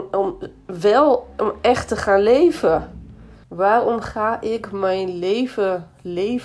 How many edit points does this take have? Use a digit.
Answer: 1